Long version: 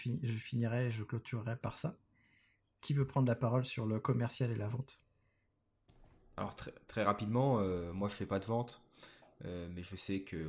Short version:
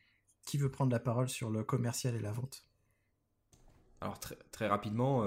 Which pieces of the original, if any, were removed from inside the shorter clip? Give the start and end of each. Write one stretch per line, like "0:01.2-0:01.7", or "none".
none